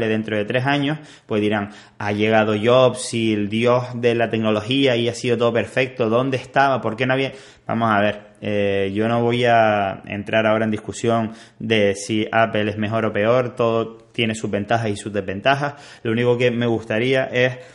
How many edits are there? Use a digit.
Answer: 0